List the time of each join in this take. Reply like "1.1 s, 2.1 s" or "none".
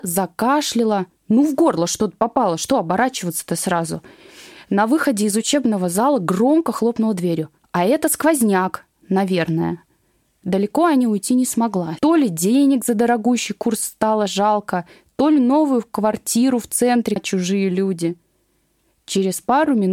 12.0 s, 17.2 s